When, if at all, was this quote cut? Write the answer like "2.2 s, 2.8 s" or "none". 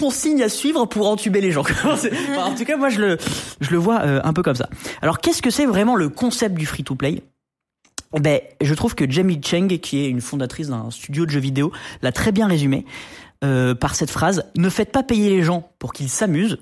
none